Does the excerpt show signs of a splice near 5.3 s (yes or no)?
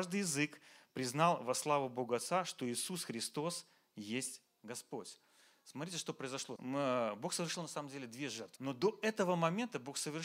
no